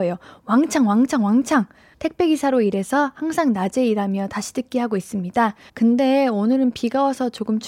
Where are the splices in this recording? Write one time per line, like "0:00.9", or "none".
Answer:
0:01.9
0:05.7